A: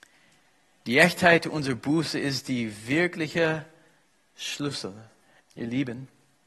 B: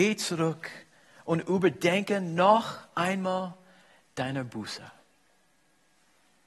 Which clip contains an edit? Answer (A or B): A